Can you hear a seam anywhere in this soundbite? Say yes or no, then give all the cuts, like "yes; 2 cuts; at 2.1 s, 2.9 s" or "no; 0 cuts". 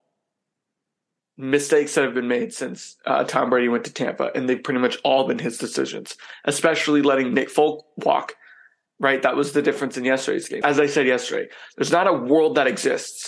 yes; 1 cut; at 10.6 s